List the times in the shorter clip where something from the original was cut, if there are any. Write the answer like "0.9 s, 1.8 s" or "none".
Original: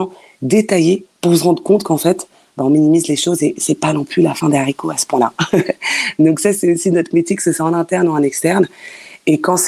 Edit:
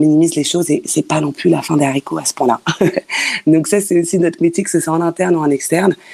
none